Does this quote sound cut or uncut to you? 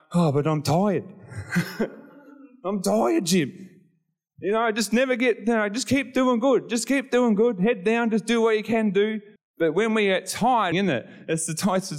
cut